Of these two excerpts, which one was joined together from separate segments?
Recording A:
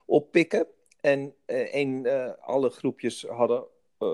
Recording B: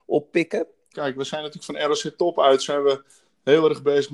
B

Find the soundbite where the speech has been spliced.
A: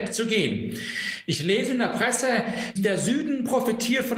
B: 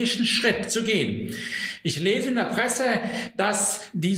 A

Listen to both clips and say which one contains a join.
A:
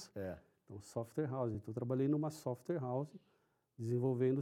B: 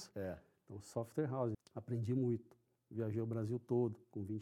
B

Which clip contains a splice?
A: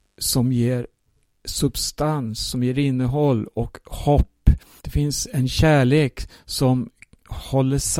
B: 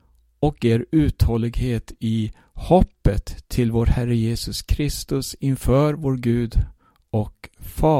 A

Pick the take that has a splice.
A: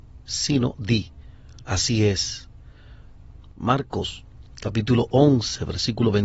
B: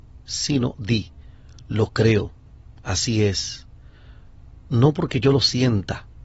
A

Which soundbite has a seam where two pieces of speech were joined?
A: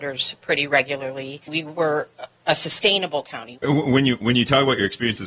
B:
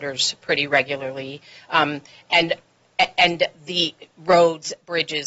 A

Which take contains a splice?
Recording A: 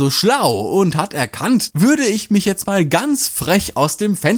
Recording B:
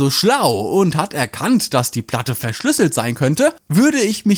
A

